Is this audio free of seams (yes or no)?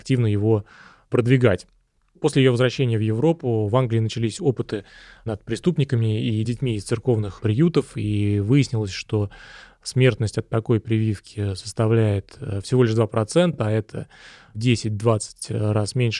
yes